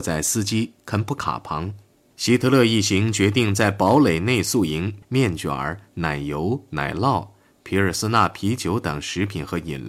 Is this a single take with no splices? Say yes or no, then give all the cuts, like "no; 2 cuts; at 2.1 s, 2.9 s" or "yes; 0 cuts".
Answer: no; 2 cuts; at 2.1 s, 5.0 s